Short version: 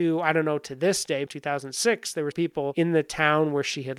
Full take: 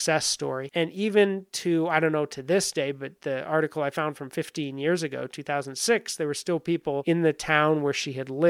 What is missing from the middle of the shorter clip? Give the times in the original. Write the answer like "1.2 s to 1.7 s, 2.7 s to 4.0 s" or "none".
2.9 s to 5.3 s, 6.3 s to 6.6 s